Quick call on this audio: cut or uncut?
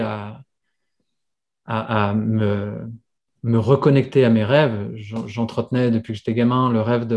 uncut